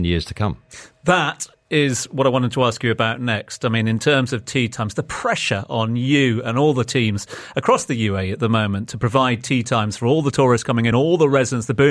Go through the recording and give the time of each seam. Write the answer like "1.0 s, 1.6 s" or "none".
none